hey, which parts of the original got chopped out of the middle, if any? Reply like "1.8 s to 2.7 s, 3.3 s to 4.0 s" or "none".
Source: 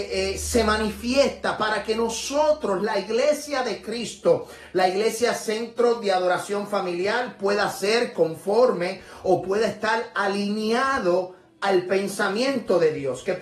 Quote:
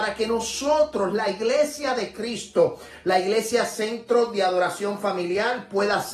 none